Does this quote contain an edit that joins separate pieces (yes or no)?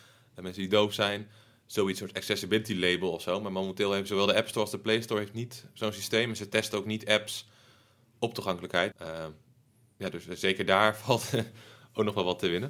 yes